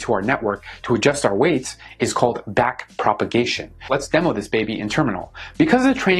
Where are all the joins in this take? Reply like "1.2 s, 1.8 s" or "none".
none